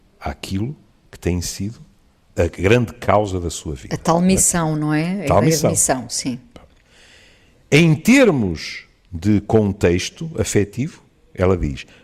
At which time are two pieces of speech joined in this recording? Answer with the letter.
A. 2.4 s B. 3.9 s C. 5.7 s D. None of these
A